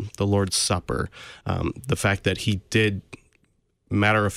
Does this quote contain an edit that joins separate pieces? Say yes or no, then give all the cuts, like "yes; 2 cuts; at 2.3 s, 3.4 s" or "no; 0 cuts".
no; 0 cuts